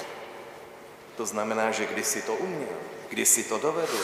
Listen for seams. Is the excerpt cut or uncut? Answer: cut